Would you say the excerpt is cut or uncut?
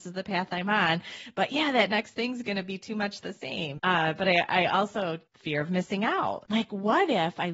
cut